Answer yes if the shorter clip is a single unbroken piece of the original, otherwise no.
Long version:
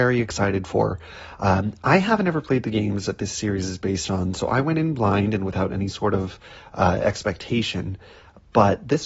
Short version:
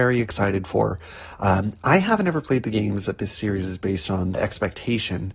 no